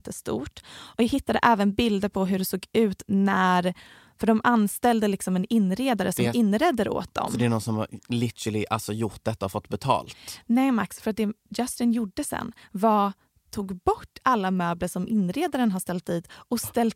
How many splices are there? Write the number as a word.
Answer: zero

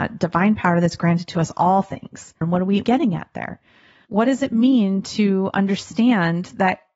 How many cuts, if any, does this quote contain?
one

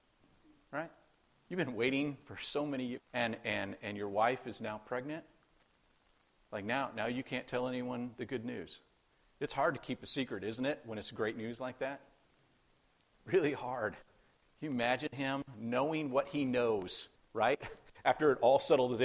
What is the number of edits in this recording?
two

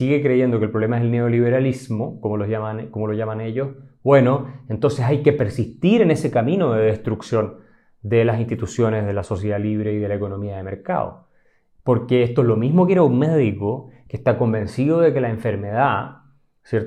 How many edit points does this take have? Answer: zero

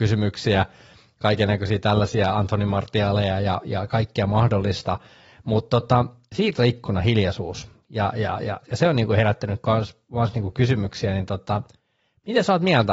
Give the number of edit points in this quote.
zero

